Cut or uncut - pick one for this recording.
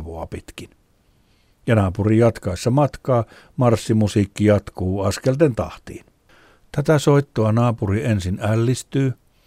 uncut